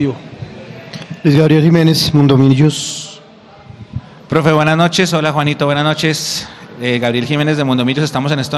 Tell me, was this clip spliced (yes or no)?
no